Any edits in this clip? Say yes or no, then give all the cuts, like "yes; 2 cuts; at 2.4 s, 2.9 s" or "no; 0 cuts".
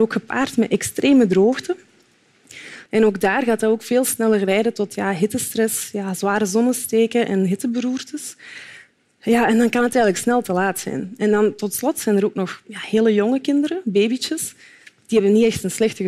yes; 1 cut; at 2.9 s